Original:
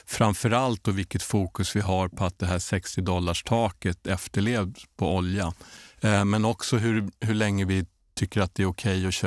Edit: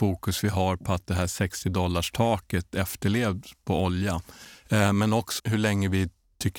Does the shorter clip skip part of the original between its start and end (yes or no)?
yes